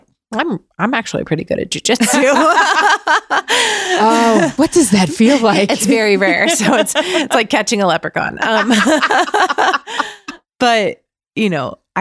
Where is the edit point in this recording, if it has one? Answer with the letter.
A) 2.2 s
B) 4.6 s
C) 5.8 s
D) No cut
B